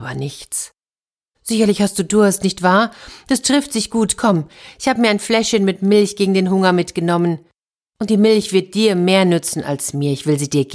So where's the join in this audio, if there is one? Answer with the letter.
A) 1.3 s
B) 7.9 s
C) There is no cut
A